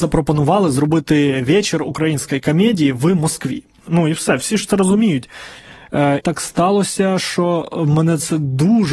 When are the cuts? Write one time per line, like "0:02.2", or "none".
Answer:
0:03.9
0:06.2

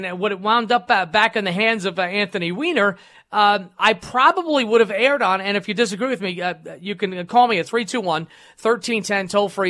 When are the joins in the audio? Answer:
none

